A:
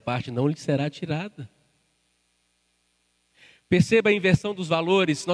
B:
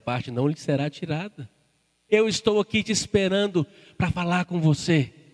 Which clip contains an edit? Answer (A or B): B